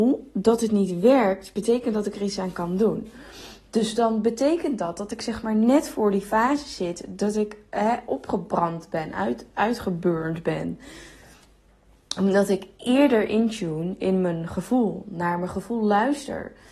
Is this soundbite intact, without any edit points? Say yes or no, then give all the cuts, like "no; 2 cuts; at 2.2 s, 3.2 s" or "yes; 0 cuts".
yes; 0 cuts